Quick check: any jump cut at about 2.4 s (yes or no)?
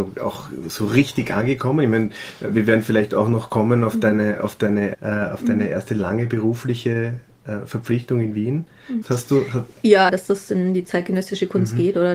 no